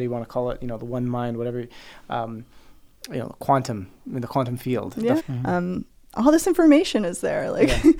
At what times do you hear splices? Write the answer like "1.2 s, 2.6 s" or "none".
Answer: 5.2 s